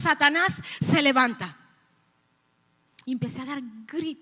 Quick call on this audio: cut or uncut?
cut